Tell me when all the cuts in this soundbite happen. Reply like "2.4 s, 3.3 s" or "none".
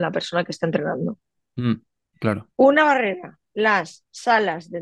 2.5 s